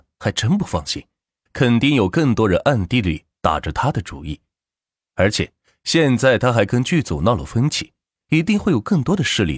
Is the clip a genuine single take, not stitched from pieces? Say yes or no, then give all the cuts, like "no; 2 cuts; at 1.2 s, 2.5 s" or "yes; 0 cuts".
no; 1 cut; at 1.5 s